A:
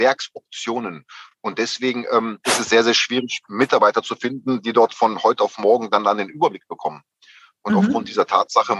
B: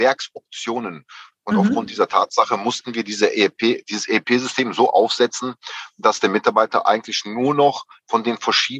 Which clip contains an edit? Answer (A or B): B